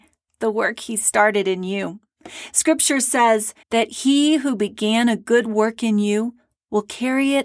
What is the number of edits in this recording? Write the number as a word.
one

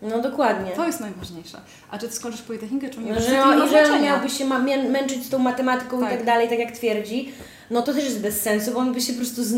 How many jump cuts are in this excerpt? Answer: one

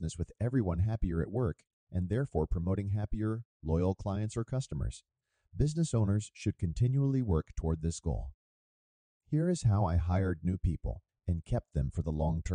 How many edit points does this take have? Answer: one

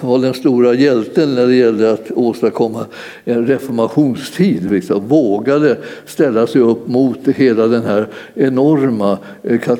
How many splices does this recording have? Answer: zero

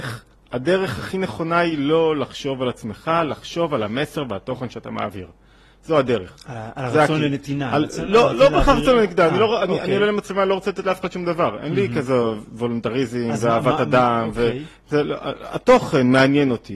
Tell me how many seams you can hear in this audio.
zero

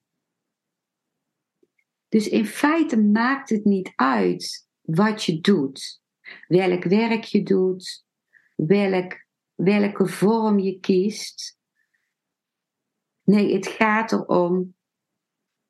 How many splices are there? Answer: one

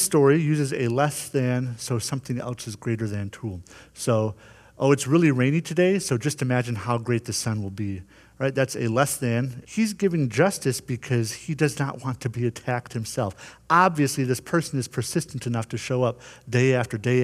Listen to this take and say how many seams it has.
one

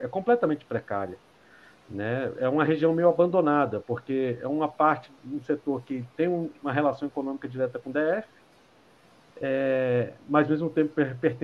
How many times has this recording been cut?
zero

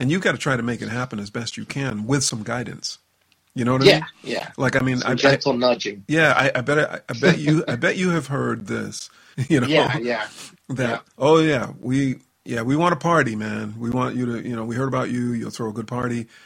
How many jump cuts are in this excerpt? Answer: two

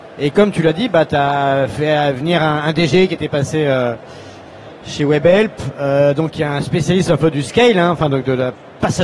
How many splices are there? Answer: zero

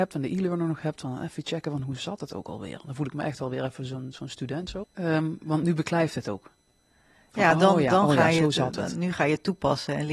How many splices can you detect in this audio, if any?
one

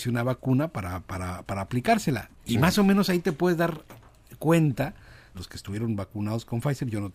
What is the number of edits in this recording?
two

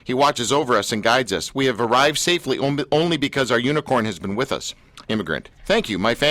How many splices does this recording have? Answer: one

